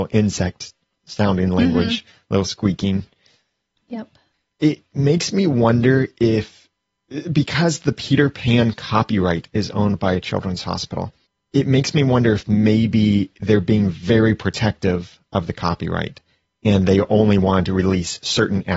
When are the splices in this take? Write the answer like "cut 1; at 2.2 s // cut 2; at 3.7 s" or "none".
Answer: cut 1; at 3.8 s